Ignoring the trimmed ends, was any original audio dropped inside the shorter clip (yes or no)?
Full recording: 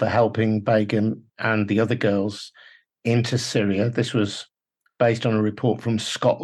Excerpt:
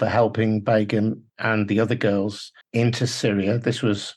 yes